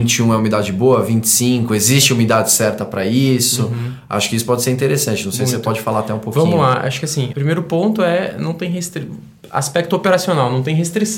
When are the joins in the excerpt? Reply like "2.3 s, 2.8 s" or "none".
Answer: 7.3 s